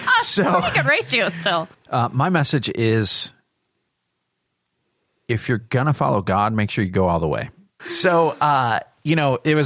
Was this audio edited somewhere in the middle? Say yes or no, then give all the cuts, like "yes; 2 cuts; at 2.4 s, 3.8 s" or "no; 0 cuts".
yes; 2 cuts; at 1.7 s, 7.8 s